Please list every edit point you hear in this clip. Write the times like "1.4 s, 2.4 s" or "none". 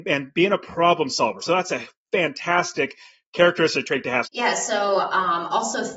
1.4 s, 4.2 s